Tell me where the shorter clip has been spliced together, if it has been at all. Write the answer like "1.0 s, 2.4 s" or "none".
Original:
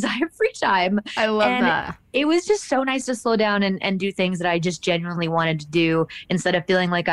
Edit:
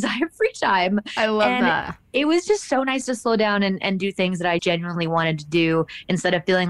4.6 s